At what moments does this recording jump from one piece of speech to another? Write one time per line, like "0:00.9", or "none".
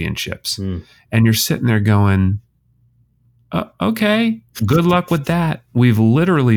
0:04.6